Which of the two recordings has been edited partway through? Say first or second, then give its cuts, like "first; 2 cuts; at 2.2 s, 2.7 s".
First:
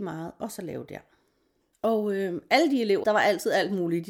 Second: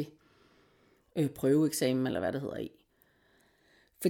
first; 2 cuts; at 1.7 s, 3.0 s